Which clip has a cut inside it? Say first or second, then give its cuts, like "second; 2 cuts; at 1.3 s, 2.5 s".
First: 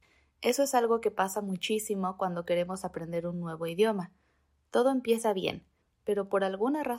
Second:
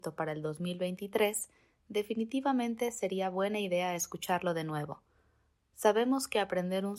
first; 1 cut; at 5.8 s